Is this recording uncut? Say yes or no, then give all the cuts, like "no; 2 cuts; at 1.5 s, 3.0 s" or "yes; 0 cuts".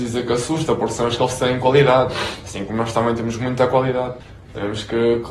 yes; 0 cuts